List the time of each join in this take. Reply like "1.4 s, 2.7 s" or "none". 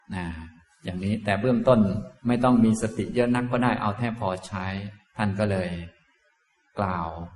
2.2 s